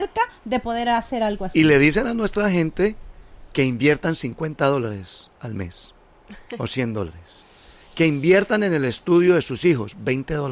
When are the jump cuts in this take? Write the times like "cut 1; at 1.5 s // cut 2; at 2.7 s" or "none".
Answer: none